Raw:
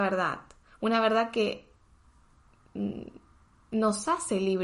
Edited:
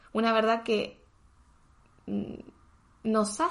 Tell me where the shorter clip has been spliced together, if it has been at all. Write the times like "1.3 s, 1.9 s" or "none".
none